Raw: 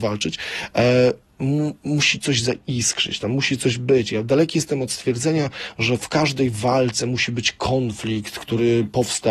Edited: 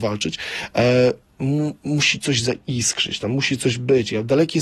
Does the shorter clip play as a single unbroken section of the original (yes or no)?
yes